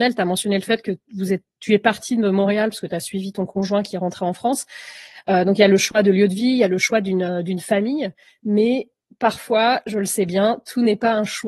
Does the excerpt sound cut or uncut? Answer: uncut